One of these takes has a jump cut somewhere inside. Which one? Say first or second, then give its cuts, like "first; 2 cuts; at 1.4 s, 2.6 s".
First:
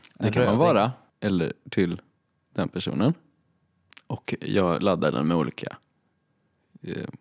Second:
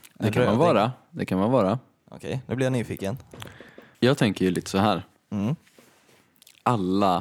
first; 1 cut; at 1.1 s